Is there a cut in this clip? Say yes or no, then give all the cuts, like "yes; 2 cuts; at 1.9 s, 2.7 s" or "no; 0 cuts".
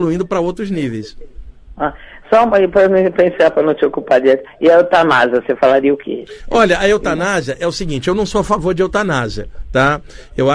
no; 0 cuts